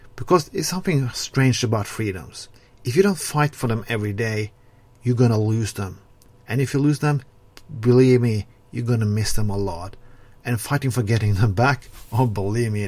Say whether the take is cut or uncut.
uncut